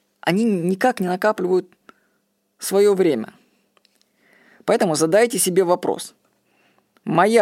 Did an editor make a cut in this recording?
no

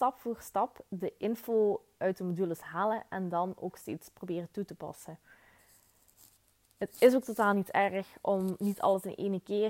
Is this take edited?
no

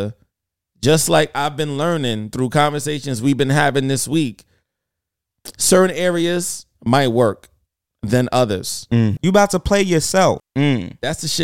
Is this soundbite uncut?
no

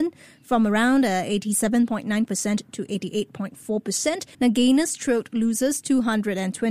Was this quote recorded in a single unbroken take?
no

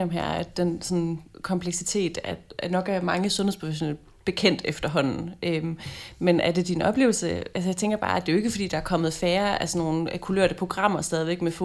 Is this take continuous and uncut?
yes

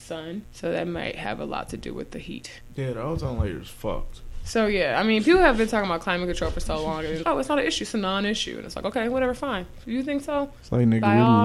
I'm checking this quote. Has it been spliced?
yes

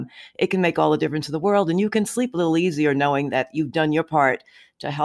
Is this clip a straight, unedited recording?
yes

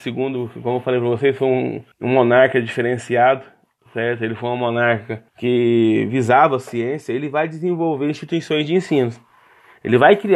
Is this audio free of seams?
no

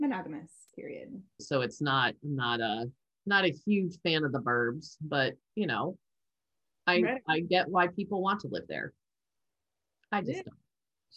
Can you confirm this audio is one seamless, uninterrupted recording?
no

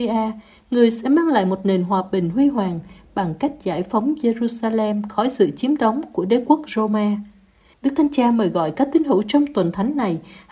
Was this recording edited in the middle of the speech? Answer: yes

